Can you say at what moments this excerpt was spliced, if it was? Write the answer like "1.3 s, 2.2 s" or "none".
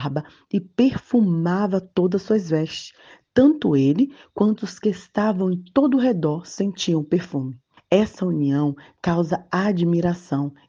7.8 s